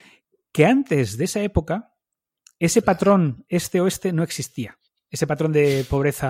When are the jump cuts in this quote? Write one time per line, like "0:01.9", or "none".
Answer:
none